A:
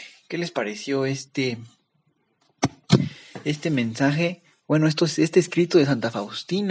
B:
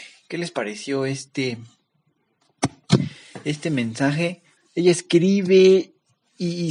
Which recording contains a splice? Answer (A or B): B